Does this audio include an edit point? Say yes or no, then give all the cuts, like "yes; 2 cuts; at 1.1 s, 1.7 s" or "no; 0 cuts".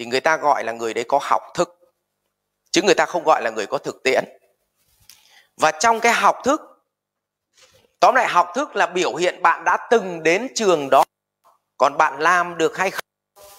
no; 0 cuts